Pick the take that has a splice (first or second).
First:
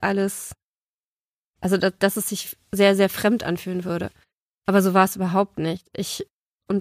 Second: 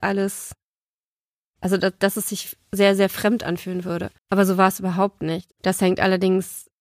second